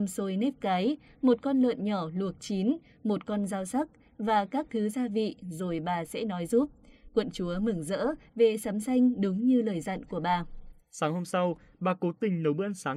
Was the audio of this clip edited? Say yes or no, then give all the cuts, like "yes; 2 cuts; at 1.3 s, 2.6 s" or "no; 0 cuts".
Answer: no; 0 cuts